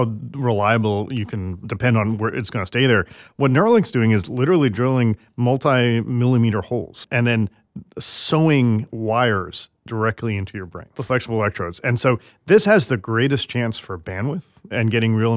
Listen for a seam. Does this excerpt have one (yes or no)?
yes